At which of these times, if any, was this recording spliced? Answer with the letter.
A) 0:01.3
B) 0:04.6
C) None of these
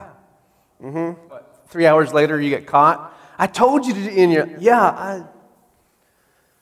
A